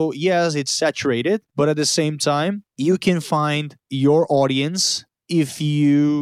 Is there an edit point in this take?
no; 0 cuts

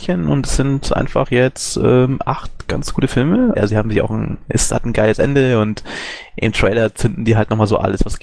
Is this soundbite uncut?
no; 1 cut; at 3.5 s

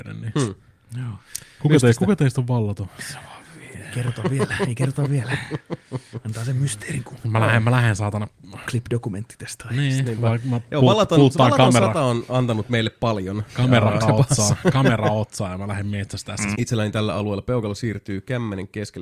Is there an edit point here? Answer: yes; 3 cuts; at 8.7 s, 14.0 s, 16.5 s

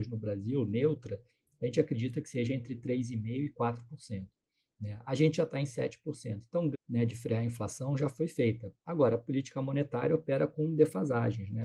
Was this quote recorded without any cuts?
no; 1 cut; at 6.7 s

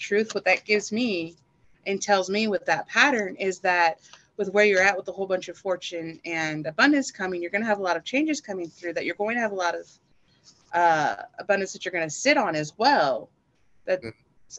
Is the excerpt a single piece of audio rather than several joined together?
yes; 0 cuts

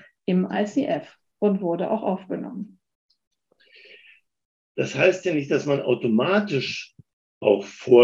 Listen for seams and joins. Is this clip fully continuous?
no; 1 cut; at 4.5 s

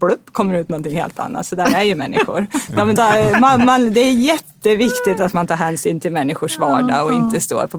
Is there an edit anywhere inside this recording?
yes; 1 cut; at 3.0 s

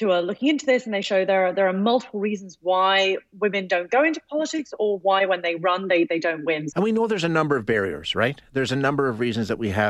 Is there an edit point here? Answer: yes; 1 cut; at 6.7 s

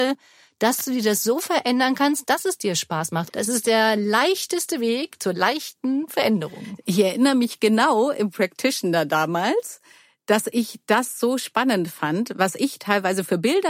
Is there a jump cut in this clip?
yes; 1 cut; at 3.3 s

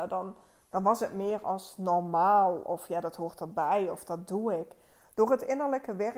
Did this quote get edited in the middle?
no; 0 cuts

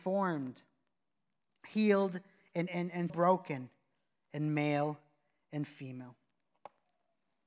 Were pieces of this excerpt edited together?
yes; 1 cut; at 3.1 s

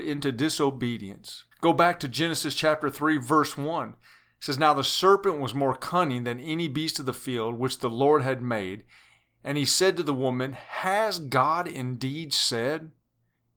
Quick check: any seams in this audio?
yes; 1 cut; at 1.5 s

